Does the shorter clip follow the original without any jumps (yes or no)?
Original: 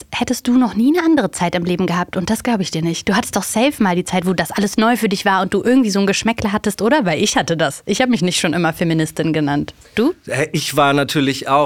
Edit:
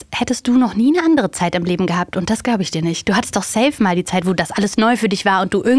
yes